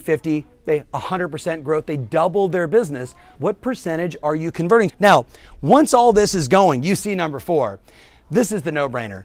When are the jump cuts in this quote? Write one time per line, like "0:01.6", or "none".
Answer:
0:03.4
0:04.9